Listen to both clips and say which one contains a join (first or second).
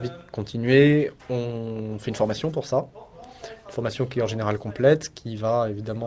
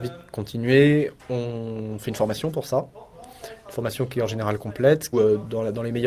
second